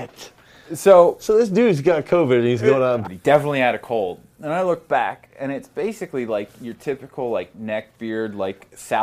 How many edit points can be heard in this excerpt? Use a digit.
1